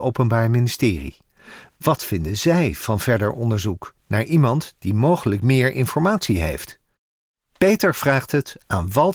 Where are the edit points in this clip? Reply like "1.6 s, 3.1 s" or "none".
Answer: none